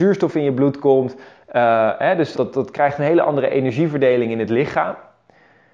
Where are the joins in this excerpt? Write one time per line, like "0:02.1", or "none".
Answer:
0:02.3